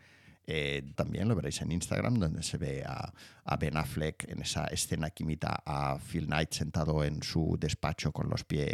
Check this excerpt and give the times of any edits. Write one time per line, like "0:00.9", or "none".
0:00.9